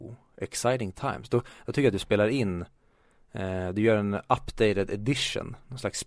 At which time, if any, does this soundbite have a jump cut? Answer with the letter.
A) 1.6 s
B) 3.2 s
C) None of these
C